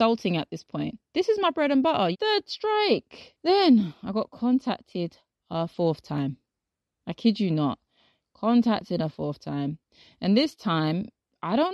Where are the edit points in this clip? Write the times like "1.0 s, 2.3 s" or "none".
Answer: 2.1 s